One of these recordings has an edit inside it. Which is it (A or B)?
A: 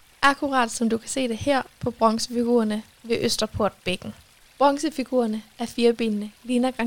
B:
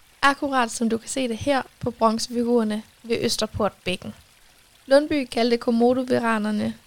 A